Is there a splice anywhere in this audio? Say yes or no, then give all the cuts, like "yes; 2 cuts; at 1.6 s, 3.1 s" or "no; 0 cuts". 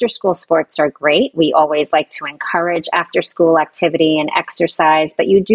no; 0 cuts